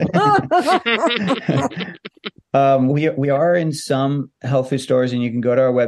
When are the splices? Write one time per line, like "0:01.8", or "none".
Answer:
0:02.9

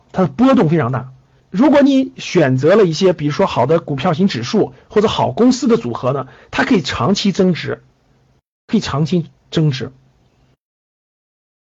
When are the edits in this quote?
0:01.4

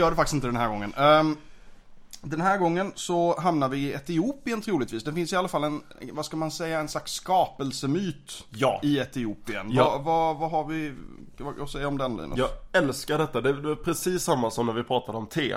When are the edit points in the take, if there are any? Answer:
none

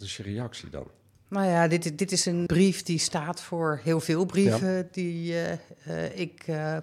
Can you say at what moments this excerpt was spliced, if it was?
0:02.5

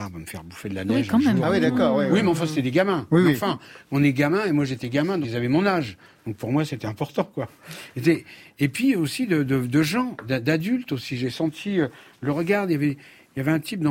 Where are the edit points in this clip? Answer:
0:05.2

